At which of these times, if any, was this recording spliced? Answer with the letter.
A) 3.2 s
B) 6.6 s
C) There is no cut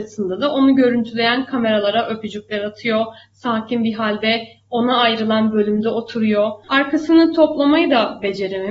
B